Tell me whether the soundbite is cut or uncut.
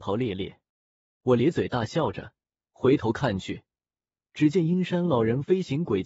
cut